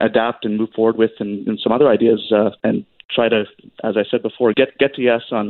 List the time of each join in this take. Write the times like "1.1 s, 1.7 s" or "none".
2.6 s, 4.5 s